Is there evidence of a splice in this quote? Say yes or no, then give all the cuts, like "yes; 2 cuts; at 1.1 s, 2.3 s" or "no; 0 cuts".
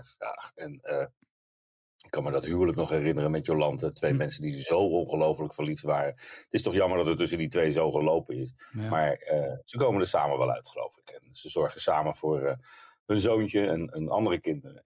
no; 0 cuts